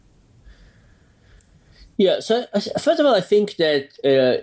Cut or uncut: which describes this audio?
uncut